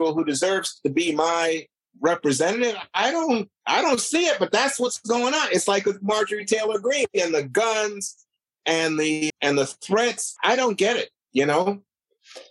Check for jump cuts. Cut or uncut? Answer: cut